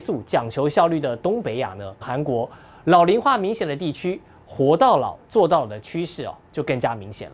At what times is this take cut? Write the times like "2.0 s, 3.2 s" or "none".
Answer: 2.0 s